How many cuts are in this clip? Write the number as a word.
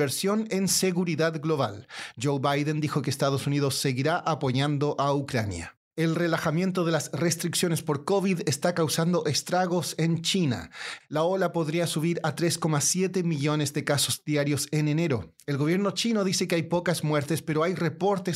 two